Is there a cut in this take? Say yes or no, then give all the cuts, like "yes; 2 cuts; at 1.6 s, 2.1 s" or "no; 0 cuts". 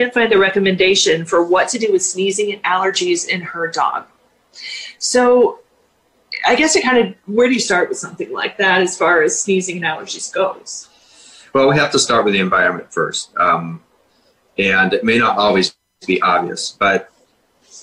no; 0 cuts